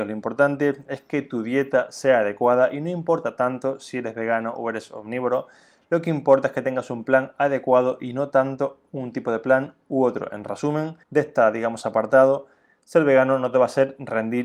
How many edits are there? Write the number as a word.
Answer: one